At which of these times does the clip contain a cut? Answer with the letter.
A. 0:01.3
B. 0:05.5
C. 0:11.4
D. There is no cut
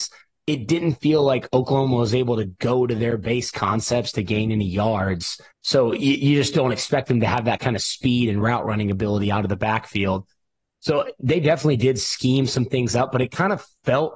B